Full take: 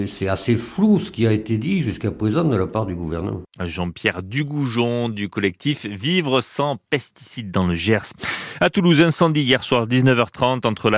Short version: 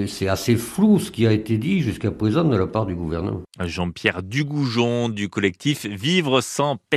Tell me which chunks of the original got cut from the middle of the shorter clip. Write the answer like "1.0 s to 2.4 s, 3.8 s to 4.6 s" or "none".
none